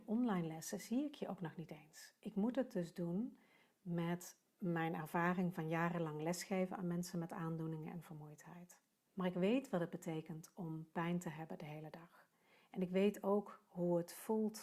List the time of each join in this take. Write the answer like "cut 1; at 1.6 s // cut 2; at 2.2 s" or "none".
cut 1; at 9.1 s